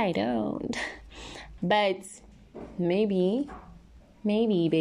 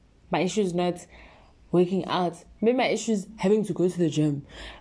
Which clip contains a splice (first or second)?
first